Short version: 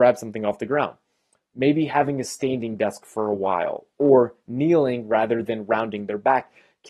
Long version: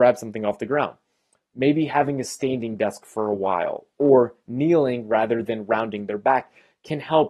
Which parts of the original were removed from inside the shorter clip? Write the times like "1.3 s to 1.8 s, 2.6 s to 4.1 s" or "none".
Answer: none